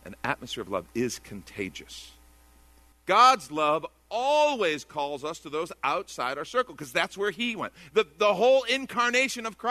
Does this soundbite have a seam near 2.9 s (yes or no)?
yes